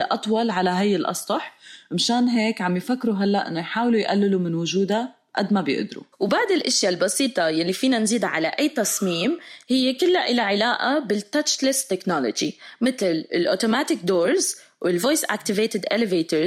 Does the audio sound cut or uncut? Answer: cut